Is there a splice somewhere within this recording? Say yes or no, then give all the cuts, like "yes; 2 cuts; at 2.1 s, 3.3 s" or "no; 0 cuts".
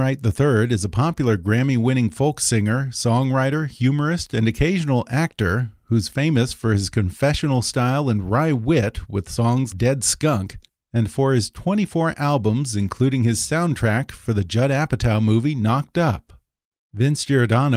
yes; 1 cut; at 9.7 s